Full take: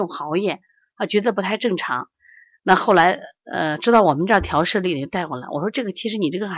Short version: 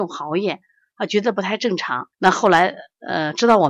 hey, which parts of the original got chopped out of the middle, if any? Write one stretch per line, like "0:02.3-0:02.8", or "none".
0:02.1-0:02.6